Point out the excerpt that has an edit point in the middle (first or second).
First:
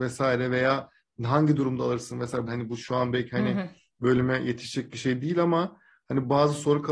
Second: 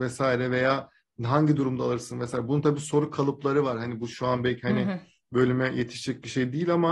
first